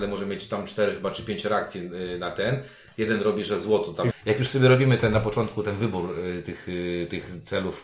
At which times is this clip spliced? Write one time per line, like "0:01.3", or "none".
0:04.1